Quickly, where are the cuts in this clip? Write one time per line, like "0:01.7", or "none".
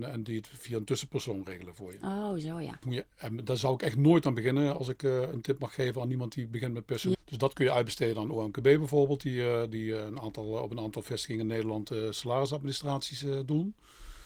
0:02.8
0:07.1